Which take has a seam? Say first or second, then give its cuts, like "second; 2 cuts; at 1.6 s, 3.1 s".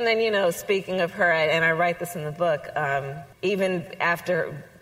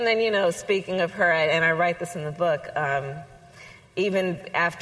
first; 1 cut; at 3.3 s